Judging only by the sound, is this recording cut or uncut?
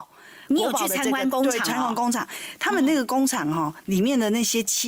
uncut